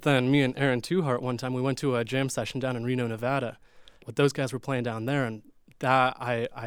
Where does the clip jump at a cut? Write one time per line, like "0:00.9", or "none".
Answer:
0:04.0

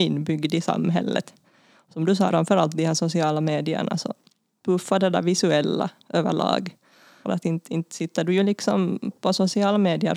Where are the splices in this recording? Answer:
0:02.3
0:04.6
0:07.2

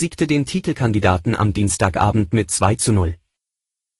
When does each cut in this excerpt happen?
none

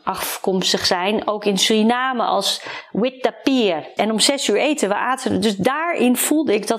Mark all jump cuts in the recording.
0:04.0

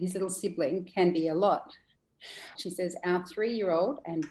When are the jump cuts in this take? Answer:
0:02.6

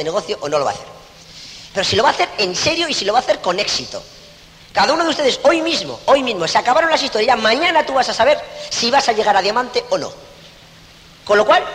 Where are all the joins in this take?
0:01.7

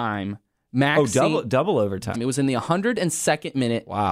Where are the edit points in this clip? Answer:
0:02.1

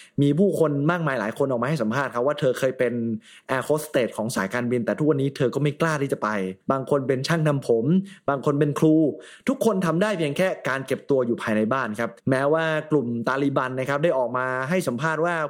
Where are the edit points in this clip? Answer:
0:06.6
0:12.2

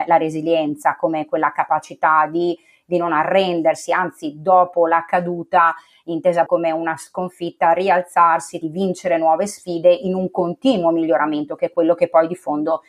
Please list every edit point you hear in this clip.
0:06.5
0:08.6

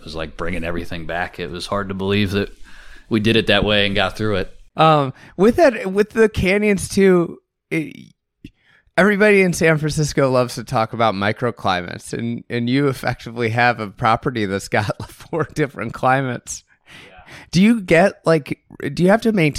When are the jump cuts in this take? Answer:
0:15.1

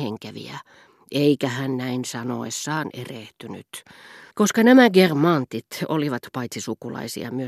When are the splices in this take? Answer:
0:04.3

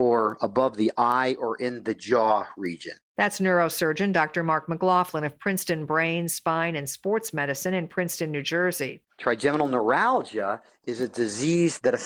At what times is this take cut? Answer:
0:09.1

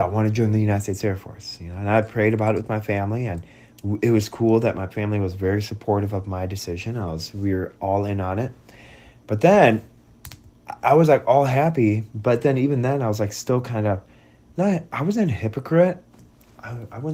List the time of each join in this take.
none

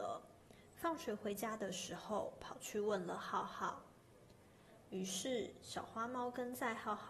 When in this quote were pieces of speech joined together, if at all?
0:04.8

